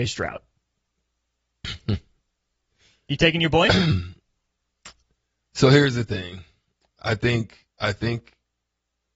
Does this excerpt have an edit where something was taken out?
no; 0 cuts

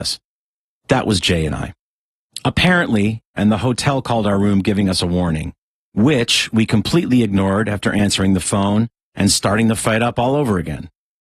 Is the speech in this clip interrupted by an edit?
yes; 1 cut; at 3.4 s

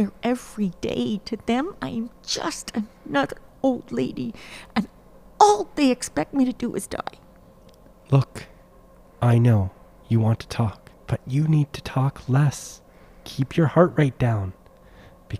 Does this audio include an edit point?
yes; 1 cut; at 11.0 s

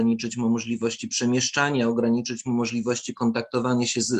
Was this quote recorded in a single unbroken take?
yes; 0 cuts

